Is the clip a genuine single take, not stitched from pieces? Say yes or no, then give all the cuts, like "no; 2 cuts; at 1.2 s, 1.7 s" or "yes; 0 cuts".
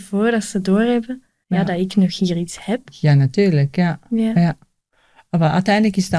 no; 1 cut; at 1.4 s